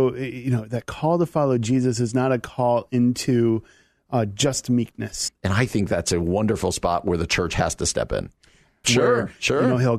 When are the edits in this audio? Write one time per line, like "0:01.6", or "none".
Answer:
0:05.3
0:08.8